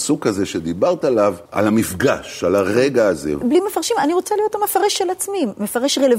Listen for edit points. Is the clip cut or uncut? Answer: cut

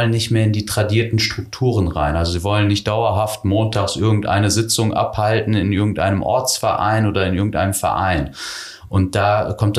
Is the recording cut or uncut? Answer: uncut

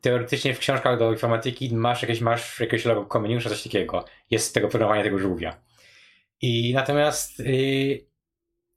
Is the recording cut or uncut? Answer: uncut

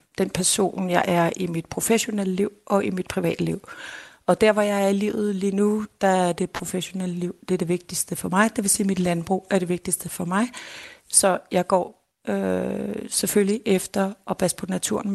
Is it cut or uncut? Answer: uncut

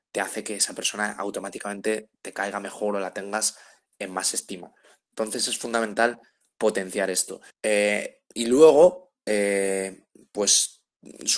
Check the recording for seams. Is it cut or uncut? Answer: cut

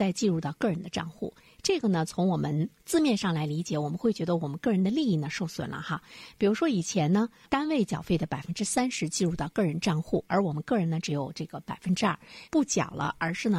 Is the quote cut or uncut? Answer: cut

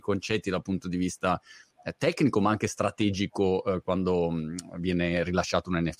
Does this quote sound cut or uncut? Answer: uncut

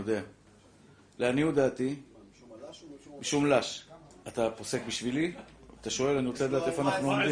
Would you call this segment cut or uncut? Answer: cut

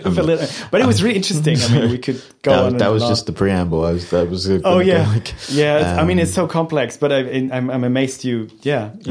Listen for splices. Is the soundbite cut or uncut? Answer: uncut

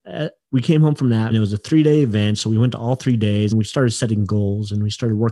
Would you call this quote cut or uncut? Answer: cut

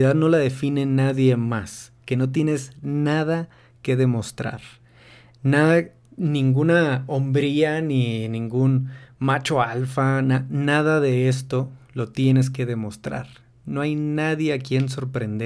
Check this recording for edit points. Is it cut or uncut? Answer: uncut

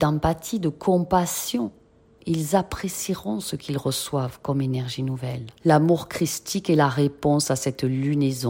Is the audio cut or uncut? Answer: cut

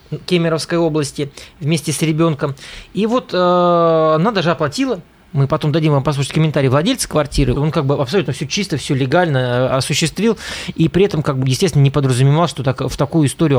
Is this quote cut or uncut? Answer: cut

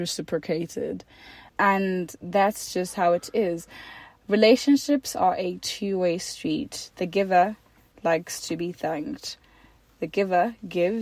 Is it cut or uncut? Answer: cut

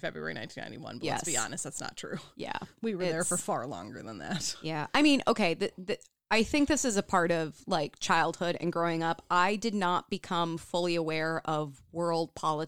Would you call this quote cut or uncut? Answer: uncut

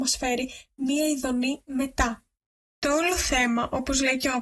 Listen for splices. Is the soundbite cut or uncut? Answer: uncut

